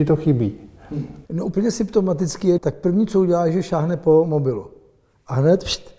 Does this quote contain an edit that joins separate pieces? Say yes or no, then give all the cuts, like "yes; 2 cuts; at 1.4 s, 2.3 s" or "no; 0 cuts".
yes; 2 cuts; at 1.3 s, 2.6 s